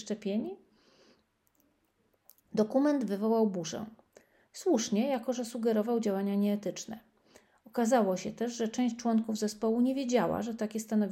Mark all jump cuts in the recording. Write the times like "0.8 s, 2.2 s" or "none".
none